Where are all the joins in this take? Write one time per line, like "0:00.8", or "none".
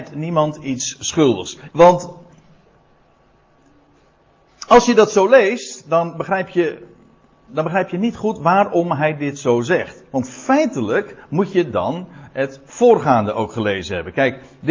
0:01.7
0:07.5